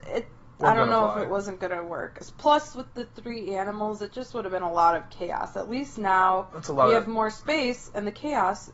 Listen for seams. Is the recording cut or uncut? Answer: uncut